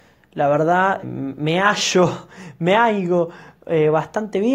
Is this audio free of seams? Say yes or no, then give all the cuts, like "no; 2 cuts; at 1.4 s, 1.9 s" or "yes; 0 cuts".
no; 1 cut; at 1.0 s